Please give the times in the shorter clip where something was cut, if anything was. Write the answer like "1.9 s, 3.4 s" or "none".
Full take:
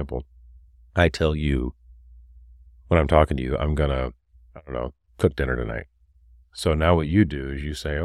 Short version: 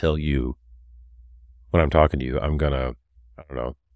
none